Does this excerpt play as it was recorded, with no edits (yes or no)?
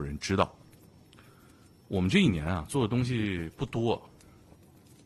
yes